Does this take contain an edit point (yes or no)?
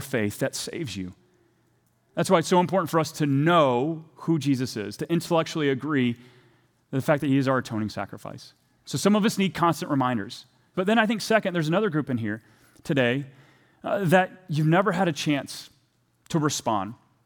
yes